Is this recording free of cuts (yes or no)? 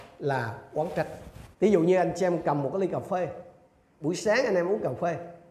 no